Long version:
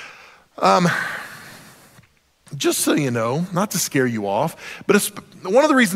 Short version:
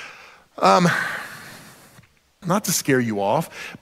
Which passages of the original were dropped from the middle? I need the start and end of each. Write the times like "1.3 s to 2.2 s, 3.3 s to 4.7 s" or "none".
2.4 s to 3.5 s